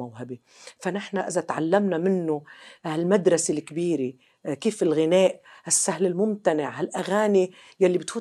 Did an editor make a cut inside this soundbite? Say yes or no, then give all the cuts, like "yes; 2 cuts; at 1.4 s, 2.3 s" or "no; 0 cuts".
no; 0 cuts